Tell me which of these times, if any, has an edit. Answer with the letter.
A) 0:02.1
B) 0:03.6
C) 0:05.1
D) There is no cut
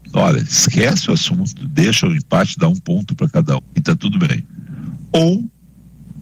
B